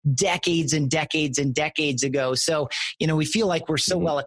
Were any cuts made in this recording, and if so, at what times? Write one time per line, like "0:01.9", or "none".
none

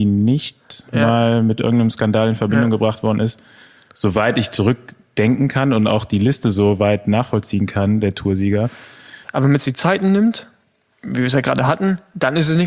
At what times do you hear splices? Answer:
0:09.2

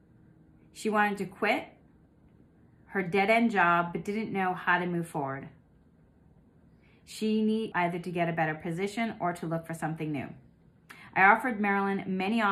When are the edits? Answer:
0:07.7

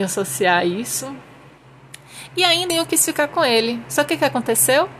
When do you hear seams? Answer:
0:02.7

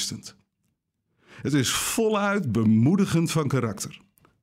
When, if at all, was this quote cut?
0:01.1

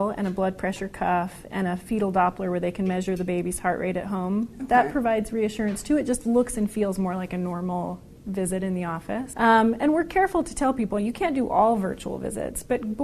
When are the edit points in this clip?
0:09.3

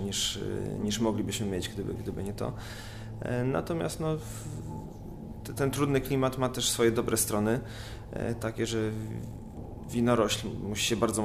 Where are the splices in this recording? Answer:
none

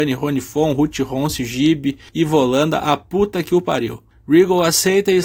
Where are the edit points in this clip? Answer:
none

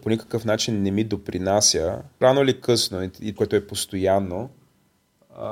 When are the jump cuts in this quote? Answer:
0:02.2
0:03.4

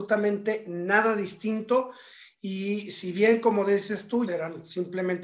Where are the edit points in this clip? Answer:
0:04.3

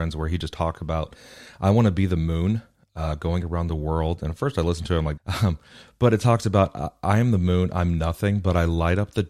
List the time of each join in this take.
0:05.2

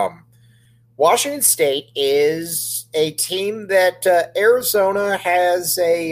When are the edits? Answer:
none

